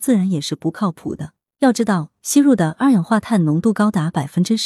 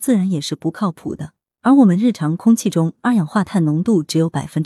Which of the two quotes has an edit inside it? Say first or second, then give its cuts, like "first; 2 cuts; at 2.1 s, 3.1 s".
second; 1 cut; at 1.5 s